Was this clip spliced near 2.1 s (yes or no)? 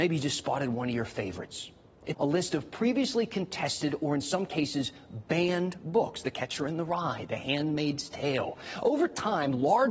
yes